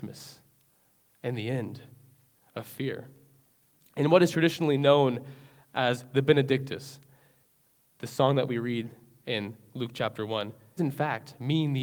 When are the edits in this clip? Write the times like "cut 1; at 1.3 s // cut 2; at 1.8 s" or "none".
cut 1; at 10.8 s